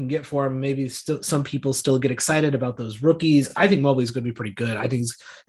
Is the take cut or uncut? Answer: uncut